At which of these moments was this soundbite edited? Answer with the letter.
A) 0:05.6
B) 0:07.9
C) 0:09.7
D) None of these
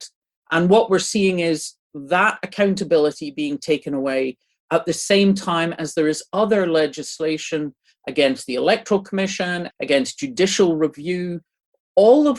C